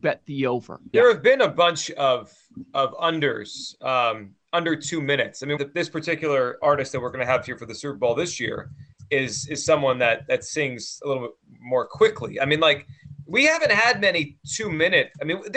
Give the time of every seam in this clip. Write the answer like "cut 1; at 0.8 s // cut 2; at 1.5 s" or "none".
cut 1; at 0.9 s // cut 2; at 5.6 s